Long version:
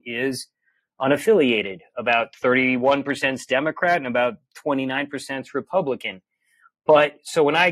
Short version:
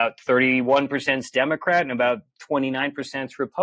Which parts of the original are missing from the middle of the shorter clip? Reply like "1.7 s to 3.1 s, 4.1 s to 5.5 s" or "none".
none